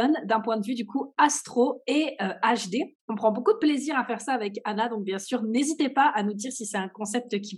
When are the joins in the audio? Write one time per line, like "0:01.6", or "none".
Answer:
0:03.0